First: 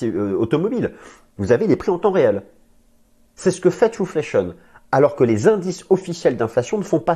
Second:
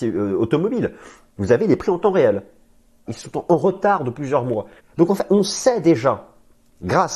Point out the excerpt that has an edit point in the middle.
second; 2 cuts; at 3.1 s, 4.8 s

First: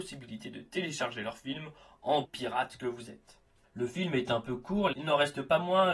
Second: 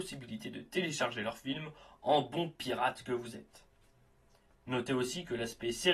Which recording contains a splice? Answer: first; 3 cuts; at 2.2 s, 3.6 s, 4.9 s

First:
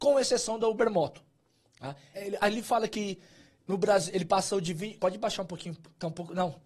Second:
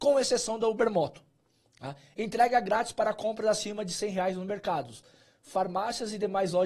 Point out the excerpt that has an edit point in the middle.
first; 2 cuts; at 2.1 s, 5.0 s

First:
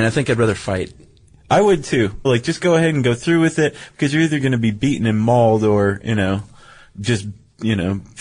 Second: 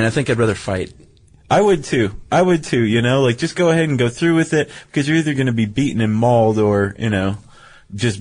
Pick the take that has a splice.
first; 1 cut; at 2.2 s

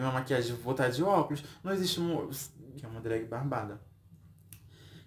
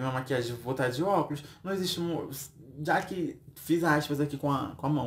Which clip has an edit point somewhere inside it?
first; 1 cut; at 2.8 s

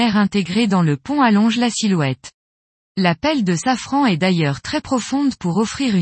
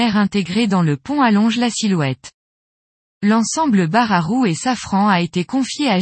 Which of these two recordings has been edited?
first; 1 cut; at 2.7 s

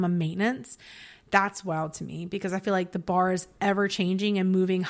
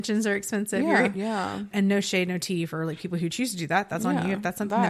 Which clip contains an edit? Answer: second; 1 cut; at 1.1 s

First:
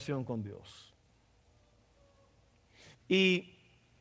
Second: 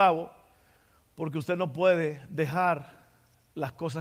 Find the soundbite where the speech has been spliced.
first; 1 cut; at 2.9 s

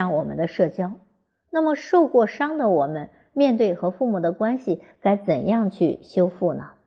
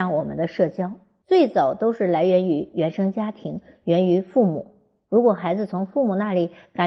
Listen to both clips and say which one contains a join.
second; 1 cut; at 1.2 s

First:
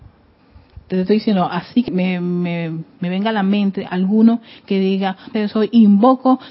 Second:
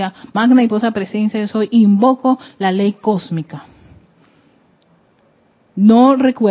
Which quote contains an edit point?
first; 2 cuts; at 1.9 s, 5.3 s

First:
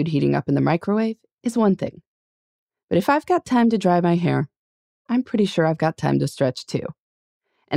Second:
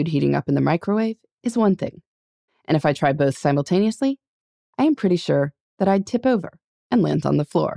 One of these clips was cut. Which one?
second; 1 cut; at 2.5 s

